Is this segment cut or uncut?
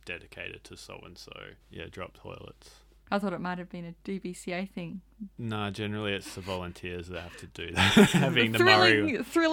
cut